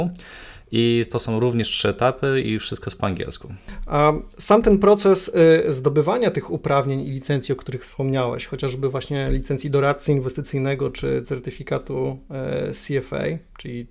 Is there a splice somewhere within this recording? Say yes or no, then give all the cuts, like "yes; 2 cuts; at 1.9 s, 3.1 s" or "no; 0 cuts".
no; 0 cuts